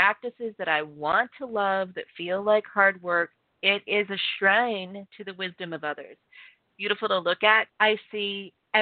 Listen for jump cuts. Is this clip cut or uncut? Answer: cut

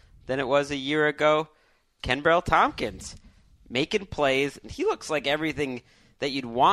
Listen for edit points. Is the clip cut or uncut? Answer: cut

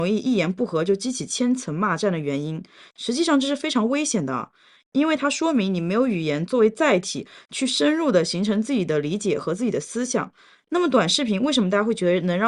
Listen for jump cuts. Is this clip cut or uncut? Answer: uncut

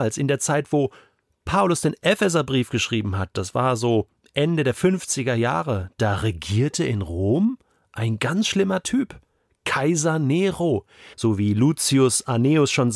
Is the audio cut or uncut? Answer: cut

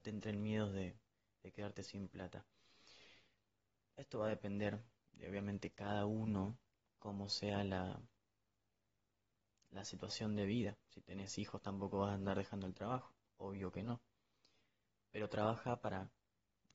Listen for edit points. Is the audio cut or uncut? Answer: uncut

